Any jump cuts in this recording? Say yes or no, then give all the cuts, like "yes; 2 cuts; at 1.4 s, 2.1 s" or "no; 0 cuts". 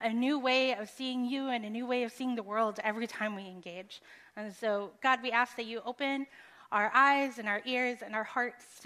no; 0 cuts